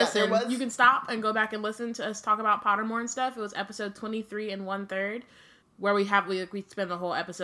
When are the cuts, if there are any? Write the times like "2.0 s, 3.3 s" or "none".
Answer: 1.1 s, 5.6 s